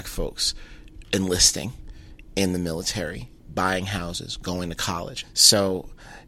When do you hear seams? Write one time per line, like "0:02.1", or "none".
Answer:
0:05.2